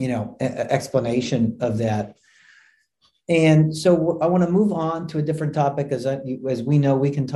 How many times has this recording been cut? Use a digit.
0